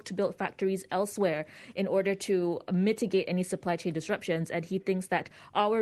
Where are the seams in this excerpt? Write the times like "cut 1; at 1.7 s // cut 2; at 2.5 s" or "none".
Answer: none

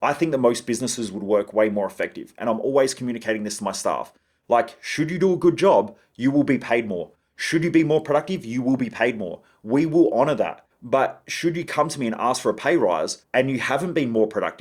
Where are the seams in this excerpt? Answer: none

